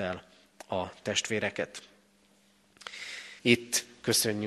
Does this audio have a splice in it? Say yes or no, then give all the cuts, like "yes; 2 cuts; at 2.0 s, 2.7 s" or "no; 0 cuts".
yes; 1 cut; at 3.4 s